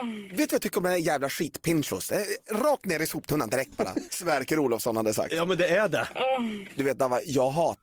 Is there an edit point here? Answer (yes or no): yes